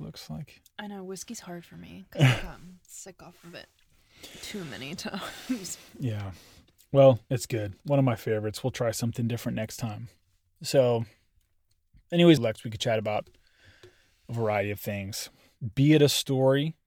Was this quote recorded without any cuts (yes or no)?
no